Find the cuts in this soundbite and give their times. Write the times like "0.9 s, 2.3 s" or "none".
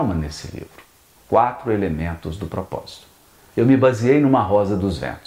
1.2 s, 3.5 s